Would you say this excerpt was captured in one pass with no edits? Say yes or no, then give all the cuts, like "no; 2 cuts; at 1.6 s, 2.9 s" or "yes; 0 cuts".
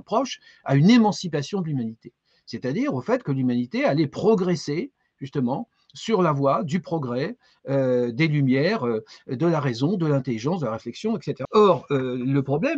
no; 1 cut; at 11.5 s